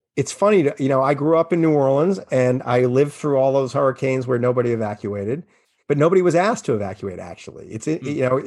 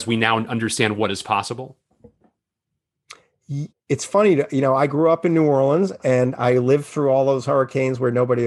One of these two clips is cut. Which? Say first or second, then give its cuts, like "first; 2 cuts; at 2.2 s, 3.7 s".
second; 1 cut; at 3.7 s